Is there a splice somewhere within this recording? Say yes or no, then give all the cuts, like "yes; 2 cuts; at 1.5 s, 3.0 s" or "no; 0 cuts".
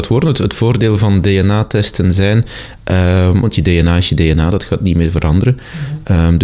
yes; 1 cut; at 3.4 s